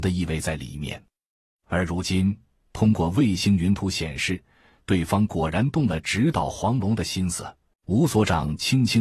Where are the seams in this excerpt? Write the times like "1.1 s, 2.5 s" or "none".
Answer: 7.7 s